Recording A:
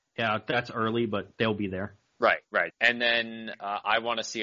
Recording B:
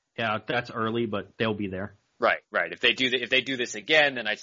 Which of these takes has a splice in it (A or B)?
A